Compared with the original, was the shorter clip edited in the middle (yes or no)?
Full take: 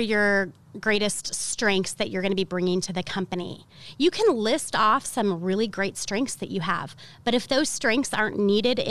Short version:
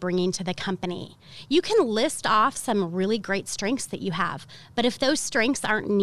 no